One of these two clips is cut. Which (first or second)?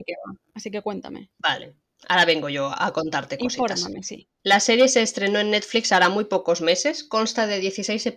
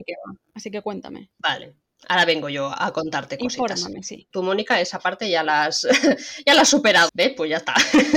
second